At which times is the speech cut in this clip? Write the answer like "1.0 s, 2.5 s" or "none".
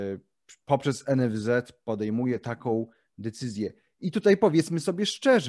3.9 s